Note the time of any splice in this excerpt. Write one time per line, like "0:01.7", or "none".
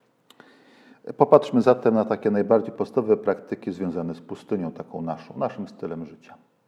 none